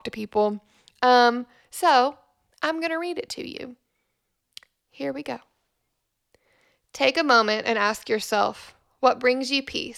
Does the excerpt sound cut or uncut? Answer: uncut